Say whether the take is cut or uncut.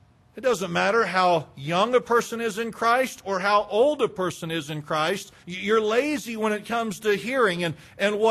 cut